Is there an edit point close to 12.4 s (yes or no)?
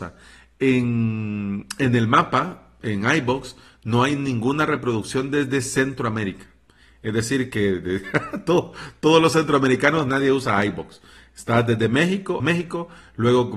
yes